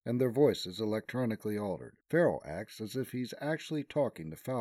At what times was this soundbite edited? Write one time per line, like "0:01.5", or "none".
0:02.0